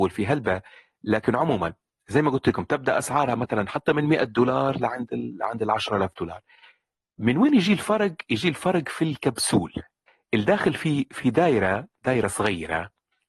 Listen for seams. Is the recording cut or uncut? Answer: uncut